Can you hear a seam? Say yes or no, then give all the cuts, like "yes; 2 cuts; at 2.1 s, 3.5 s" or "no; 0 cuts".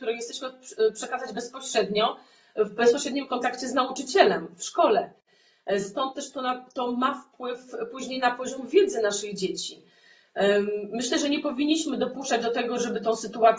no; 0 cuts